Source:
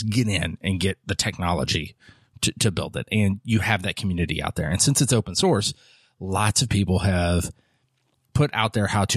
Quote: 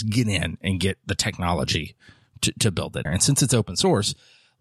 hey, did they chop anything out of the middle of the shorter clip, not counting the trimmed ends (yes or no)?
yes